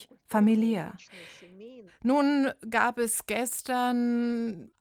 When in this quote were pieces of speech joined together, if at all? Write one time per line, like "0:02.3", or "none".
0:01.9